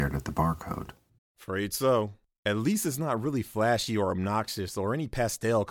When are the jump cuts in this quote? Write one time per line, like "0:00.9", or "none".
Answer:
0:01.2